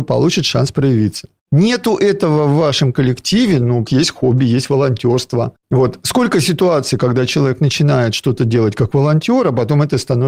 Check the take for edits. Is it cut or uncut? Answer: cut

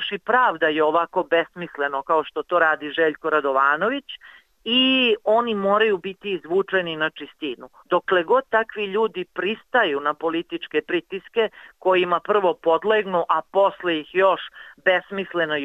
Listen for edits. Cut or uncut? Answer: cut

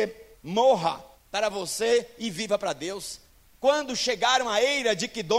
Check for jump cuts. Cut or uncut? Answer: cut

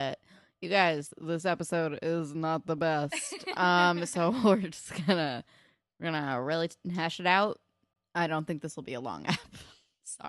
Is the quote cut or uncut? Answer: uncut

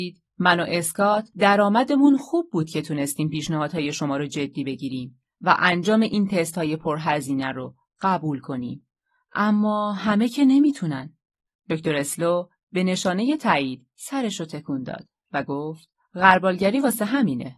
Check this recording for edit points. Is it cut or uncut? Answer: uncut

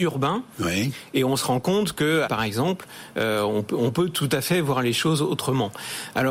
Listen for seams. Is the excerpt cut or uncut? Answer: cut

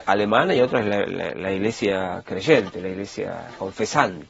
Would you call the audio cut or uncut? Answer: uncut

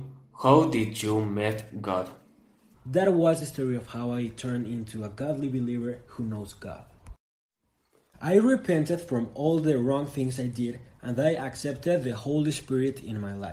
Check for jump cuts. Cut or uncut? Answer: cut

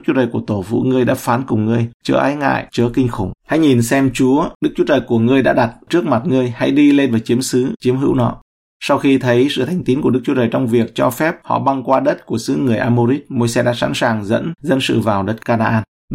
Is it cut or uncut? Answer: uncut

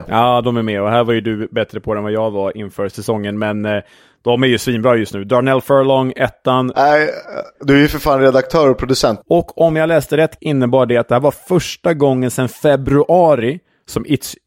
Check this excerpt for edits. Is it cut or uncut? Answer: cut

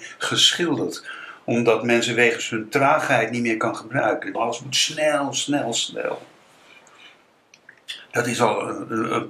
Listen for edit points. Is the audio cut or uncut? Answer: cut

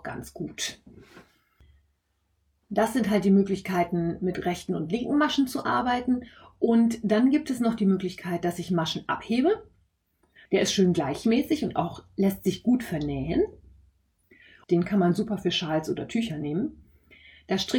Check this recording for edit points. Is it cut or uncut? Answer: cut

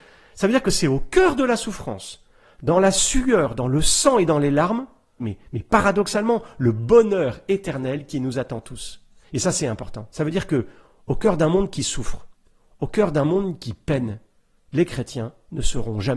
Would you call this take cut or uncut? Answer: cut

